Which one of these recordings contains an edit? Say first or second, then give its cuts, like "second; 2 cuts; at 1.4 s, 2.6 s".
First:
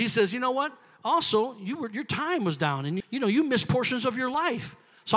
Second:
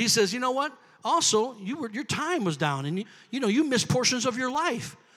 first; 1 cut; at 3.0 s